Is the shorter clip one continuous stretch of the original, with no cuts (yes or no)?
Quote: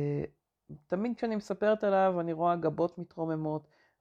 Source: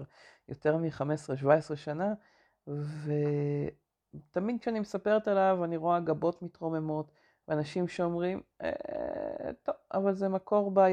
yes